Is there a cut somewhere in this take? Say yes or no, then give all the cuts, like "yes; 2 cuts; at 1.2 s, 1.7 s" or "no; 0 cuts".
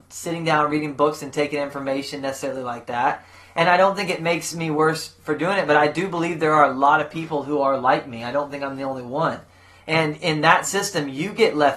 no; 0 cuts